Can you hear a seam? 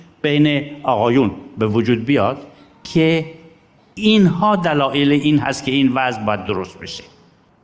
no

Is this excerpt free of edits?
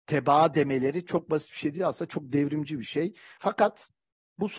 no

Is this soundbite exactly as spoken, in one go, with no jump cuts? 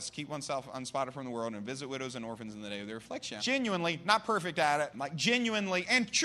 no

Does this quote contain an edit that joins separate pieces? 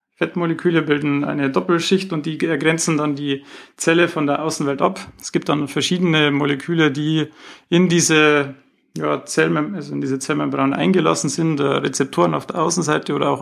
no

